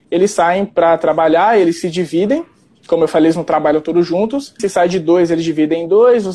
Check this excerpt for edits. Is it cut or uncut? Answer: cut